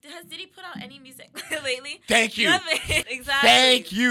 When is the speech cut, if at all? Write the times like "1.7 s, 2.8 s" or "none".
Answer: 3.0 s

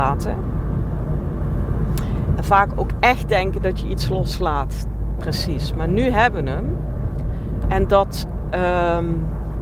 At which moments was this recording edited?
2.4 s, 5.2 s, 7.6 s

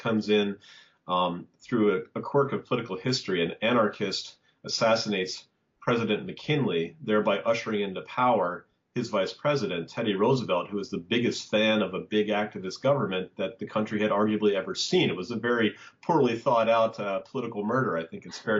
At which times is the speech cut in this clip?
none

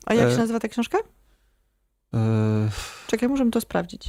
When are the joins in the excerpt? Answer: 2.1 s

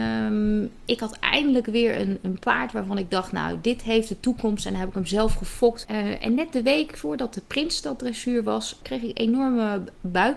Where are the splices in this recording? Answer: 5.8 s, 8.8 s

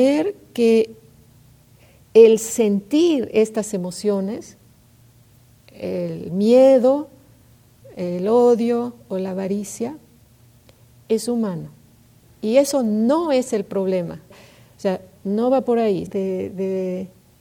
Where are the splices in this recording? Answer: 12.2 s, 14.3 s, 16.1 s

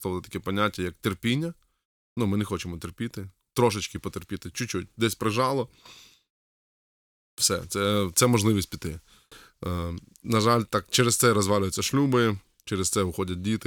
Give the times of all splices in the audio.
none

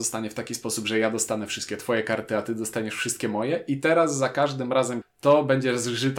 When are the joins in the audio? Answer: 5.0 s

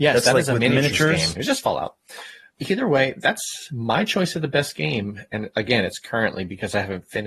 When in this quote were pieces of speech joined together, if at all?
1.4 s

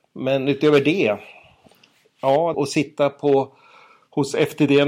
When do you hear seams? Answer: 2.5 s

